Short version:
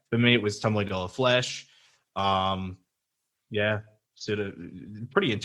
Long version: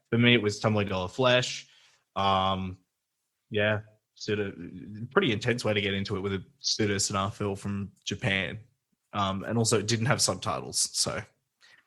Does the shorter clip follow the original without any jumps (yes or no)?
yes